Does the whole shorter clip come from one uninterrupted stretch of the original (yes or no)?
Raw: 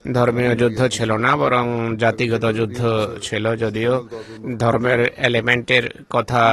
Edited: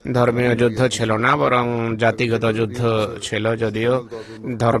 yes